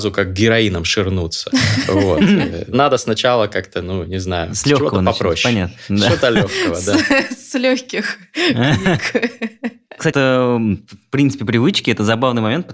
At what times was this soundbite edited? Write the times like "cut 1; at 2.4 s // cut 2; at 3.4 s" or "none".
cut 1; at 10.1 s